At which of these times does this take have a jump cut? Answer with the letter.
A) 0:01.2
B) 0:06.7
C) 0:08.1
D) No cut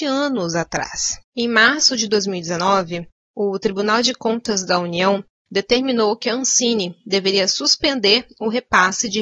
A